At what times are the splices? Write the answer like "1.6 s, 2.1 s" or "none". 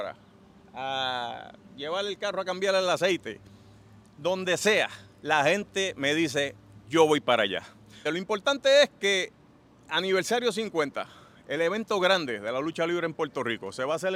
8.1 s

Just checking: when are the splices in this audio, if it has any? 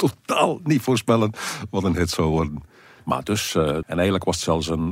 3.8 s

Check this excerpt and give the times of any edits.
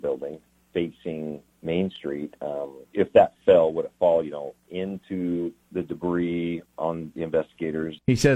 6.7 s

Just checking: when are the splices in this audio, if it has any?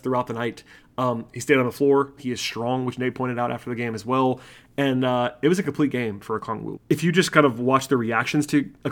2.2 s, 6.7 s

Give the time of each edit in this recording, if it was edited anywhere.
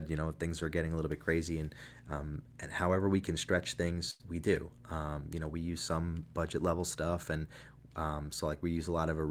none

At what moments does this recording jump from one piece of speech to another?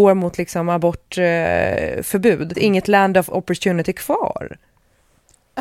2.5 s

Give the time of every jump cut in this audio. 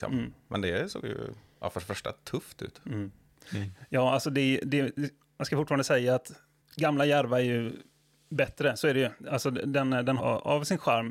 10.2 s

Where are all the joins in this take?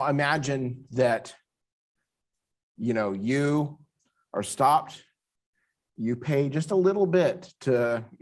none

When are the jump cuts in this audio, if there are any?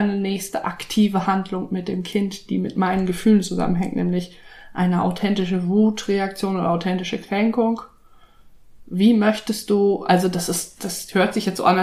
none

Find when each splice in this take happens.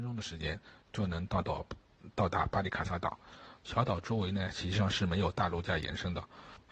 3.6 s

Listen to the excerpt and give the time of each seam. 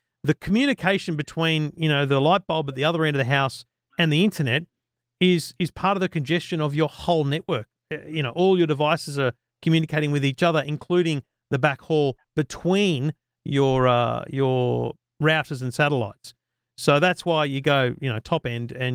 none

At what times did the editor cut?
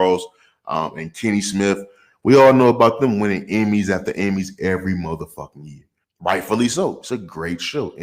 6.0 s

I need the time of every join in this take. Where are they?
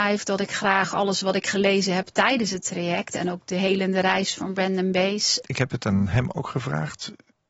5.4 s

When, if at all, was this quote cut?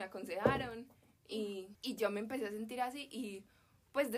1.7 s

